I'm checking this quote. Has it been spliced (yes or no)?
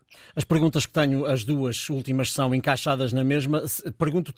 no